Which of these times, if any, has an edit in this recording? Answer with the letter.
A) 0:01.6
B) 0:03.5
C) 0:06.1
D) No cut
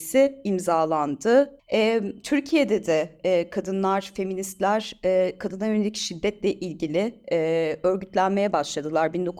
A